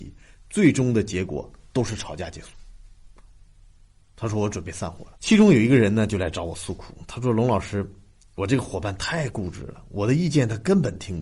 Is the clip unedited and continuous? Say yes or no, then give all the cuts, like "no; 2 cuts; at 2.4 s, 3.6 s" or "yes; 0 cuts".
no; 1 cut; at 5.1 s